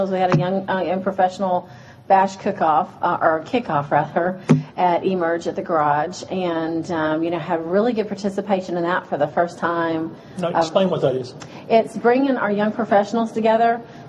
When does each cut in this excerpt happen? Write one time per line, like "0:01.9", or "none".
none